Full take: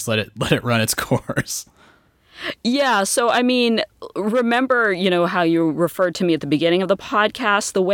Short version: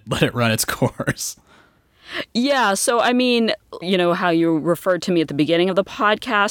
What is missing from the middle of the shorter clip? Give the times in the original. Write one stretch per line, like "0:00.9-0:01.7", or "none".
0:04.1-0:04.9